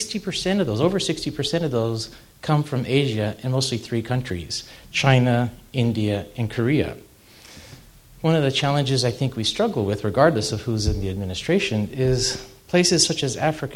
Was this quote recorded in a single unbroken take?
yes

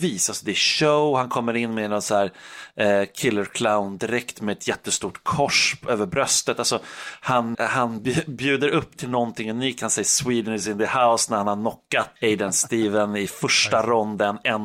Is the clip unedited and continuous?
no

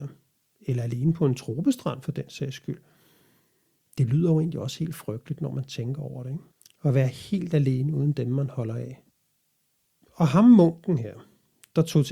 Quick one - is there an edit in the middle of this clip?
no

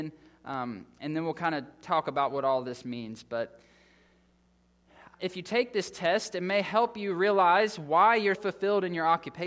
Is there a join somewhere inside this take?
yes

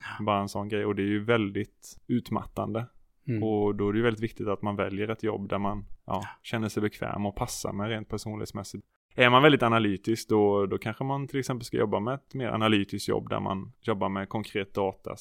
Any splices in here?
no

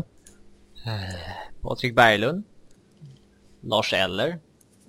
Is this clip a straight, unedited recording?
yes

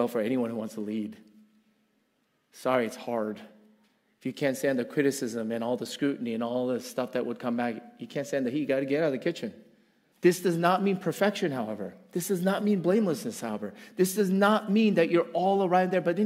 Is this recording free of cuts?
no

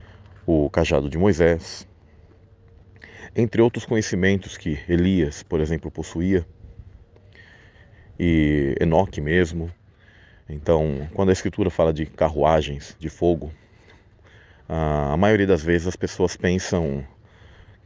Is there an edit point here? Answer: no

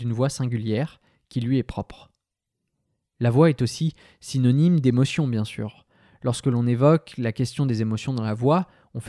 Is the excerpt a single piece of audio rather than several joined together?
yes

